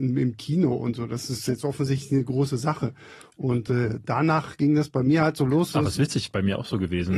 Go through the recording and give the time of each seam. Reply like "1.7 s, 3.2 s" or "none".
none